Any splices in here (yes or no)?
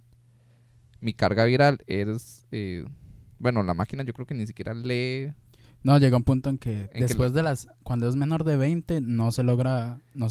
no